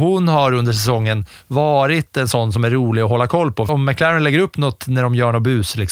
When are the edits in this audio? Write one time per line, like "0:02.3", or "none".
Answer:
0:03.7